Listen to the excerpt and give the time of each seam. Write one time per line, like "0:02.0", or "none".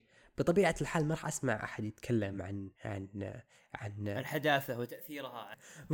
0:02.7